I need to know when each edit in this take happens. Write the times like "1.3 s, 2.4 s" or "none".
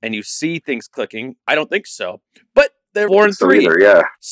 1.4 s, 3.1 s